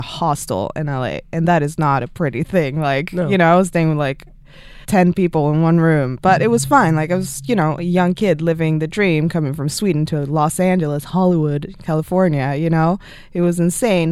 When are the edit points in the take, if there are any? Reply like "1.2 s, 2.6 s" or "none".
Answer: 4.8 s

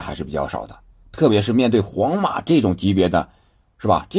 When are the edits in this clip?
none

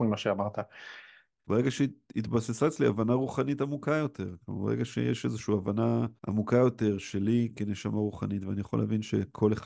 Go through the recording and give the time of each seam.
1.4 s, 6.2 s

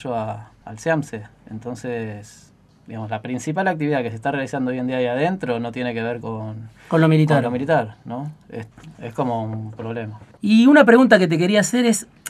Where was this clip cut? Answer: 8.9 s, 10.4 s

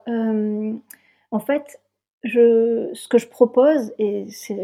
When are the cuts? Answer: none

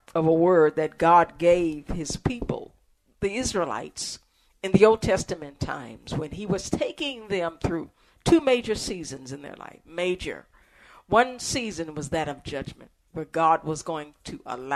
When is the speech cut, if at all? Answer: none

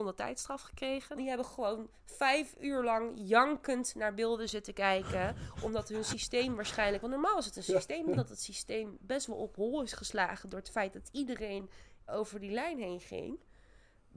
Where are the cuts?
1.2 s, 8.2 s, 12.1 s

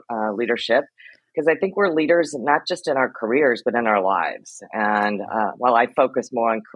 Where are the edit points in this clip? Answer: none

